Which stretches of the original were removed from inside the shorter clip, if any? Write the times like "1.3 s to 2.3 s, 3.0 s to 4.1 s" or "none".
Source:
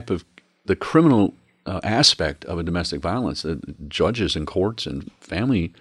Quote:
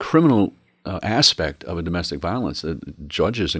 none